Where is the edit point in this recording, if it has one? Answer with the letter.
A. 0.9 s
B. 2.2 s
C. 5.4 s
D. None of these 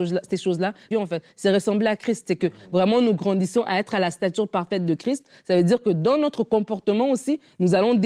A